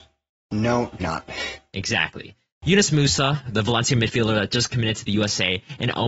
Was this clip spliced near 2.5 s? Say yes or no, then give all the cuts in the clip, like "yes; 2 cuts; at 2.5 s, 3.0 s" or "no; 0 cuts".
yes; 2 cuts; at 1.0 s, 2.5 s